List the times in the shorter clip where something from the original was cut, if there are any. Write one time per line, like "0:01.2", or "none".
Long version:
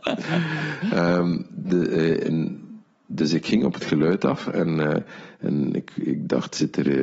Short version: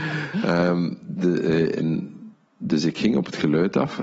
none